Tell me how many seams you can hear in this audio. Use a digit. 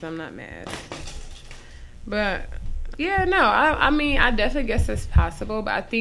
1